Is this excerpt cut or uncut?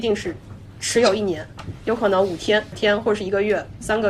uncut